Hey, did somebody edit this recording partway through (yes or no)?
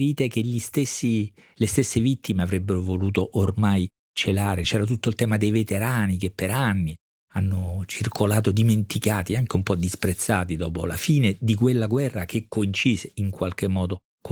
no